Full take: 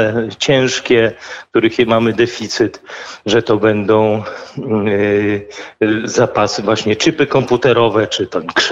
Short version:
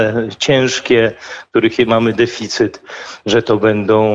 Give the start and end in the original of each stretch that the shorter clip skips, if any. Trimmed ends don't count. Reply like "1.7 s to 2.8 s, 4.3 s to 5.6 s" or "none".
none